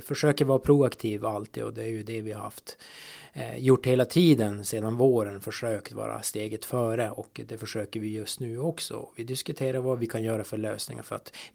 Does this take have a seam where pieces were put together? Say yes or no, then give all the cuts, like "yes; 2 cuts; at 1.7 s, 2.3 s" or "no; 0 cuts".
no; 0 cuts